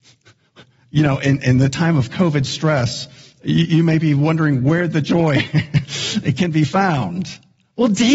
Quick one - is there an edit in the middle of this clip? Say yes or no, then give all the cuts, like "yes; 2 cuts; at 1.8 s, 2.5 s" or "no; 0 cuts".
no; 0 cuts